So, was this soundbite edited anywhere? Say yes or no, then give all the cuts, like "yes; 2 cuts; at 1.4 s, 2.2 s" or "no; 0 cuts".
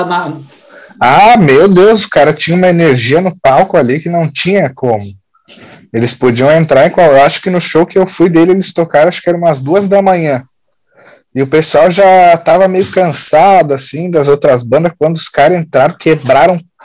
no; 0 cuts